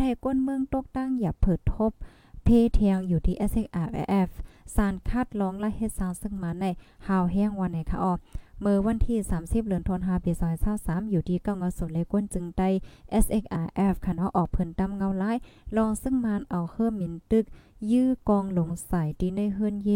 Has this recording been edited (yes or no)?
no